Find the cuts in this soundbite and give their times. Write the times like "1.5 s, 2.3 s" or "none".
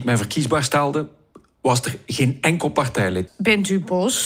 3.3 s